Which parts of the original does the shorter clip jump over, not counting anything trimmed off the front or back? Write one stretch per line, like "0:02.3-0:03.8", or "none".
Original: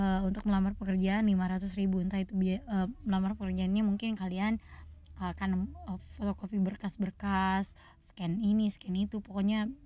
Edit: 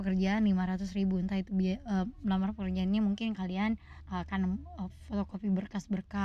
0:04.8-0:05.1